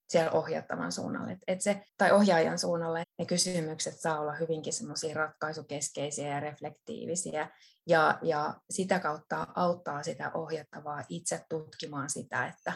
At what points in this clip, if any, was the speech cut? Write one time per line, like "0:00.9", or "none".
0:01.9
0:03.0